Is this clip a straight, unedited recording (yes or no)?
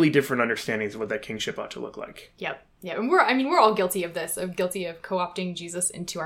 yes